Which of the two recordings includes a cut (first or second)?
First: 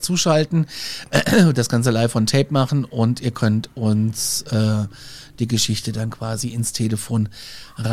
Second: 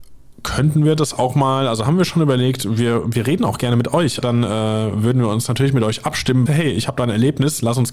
second